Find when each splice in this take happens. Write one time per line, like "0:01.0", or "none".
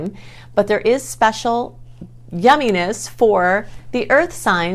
none